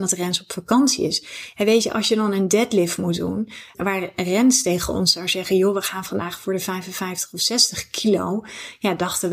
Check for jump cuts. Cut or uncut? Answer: cut